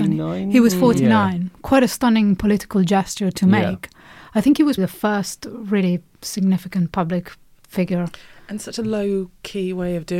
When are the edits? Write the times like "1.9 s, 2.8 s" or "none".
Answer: 4.8 s